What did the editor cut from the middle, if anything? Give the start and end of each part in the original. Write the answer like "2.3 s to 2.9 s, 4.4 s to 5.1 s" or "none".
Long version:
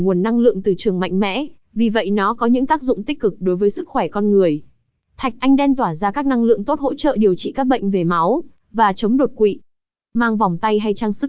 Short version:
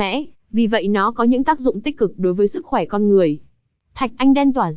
none